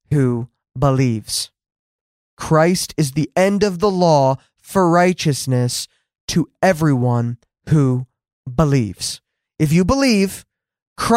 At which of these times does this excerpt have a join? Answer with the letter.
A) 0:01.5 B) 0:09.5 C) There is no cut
C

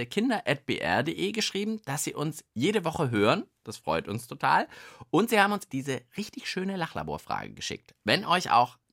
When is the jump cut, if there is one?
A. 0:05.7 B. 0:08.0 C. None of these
A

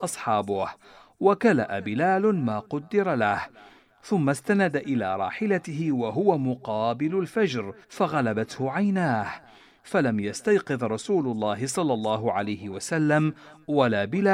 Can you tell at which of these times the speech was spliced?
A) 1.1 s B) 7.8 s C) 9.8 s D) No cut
B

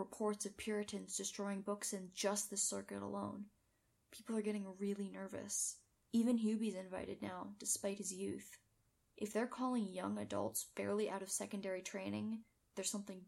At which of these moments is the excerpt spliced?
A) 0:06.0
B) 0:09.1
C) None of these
A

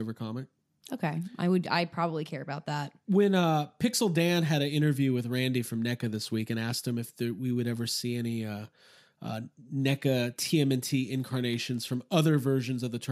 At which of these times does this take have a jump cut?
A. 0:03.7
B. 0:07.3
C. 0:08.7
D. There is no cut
D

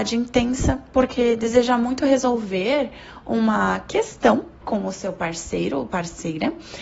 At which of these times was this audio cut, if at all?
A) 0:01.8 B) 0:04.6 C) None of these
B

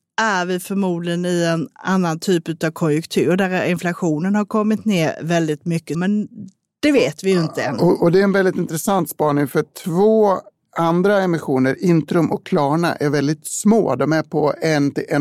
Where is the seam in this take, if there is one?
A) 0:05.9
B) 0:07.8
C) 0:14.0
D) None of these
A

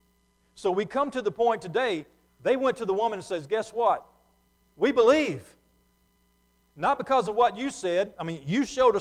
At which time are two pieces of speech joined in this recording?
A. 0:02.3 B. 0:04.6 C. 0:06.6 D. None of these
A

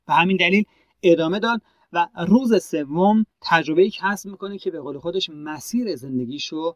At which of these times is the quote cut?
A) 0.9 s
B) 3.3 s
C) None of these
B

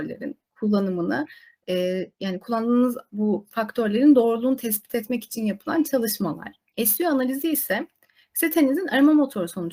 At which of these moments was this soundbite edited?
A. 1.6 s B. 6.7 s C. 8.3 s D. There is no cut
B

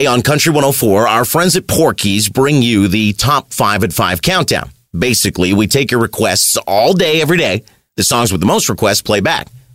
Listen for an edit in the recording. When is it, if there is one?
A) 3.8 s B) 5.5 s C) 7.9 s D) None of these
C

